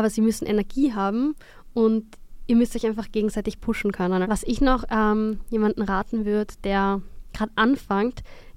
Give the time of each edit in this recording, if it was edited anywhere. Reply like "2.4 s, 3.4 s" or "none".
4.2 s